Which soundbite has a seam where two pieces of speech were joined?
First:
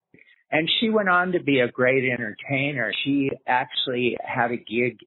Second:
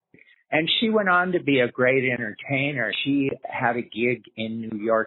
second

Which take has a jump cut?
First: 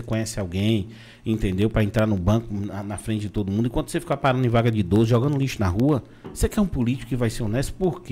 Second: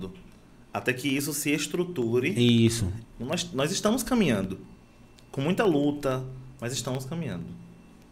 second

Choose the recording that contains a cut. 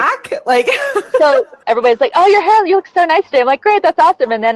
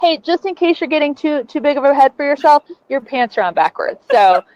first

